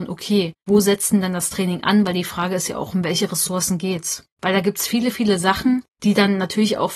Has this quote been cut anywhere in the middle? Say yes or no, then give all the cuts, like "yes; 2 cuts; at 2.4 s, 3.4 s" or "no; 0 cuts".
yes; 1 cut; at 4.3 s